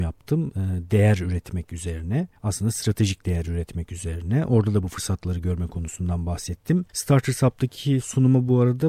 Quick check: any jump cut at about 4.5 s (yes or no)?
no